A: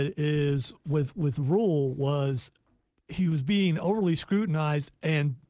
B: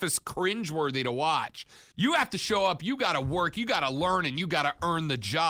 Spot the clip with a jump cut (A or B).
B